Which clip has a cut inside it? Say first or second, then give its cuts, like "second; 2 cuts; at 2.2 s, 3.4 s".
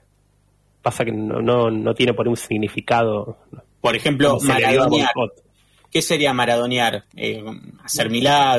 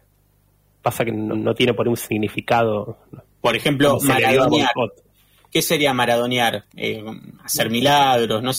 second; 1 cut; at 1.3 s